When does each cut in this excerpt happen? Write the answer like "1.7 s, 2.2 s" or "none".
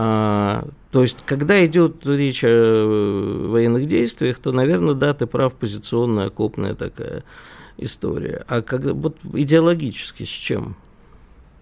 none